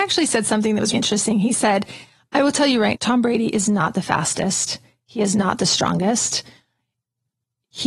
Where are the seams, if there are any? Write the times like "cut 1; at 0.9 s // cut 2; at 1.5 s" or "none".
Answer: cut 1; at 0.9 s // cut 2; at 2.9 s